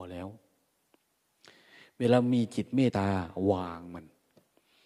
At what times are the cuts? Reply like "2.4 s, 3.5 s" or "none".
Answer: 2.9 s

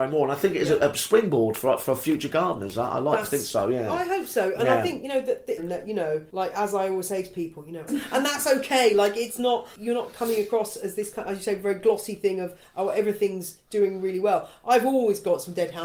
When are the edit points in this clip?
5.6 s, 7.9 s

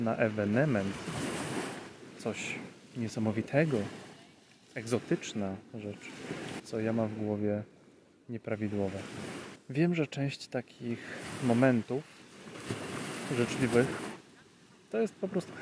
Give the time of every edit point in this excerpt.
6.6 s, 9.6 s

